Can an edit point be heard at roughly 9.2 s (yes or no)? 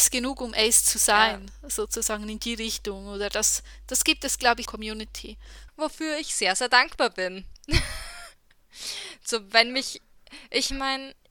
no